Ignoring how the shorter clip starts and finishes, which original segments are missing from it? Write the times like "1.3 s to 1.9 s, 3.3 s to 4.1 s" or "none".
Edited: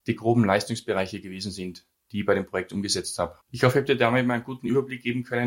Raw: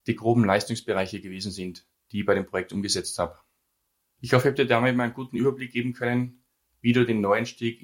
3.4 s to 4.1 s